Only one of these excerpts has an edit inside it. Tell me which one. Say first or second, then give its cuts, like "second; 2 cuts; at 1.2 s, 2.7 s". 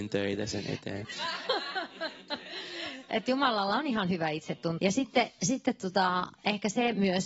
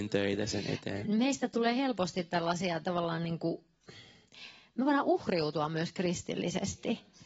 first; 2 cuts; at 1.0 s, 4.8 s